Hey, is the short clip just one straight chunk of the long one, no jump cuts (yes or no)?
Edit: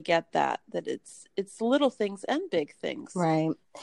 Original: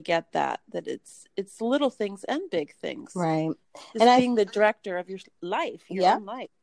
yes